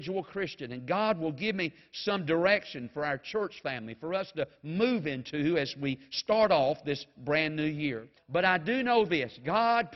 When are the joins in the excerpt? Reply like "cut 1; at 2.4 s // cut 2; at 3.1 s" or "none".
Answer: cut 1; at 8.2 s